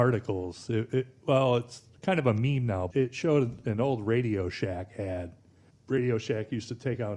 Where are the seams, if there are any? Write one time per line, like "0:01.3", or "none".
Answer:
0:02.9